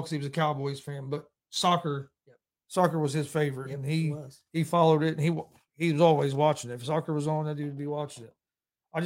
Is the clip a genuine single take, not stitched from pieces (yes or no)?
yes